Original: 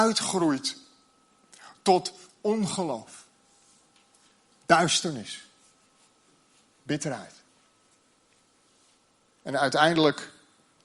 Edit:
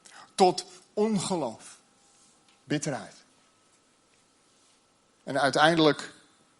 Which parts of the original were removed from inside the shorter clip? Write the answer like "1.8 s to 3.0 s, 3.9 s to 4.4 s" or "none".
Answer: 4.1 s to 6.8 s